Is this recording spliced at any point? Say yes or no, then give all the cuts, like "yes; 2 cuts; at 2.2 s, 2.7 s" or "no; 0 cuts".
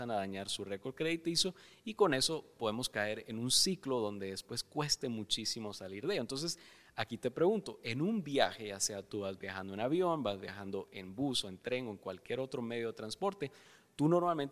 no; 0 cuts